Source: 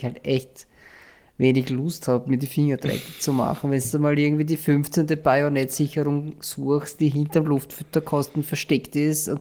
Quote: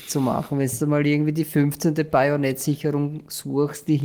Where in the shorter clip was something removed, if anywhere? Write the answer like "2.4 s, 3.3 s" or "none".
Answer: none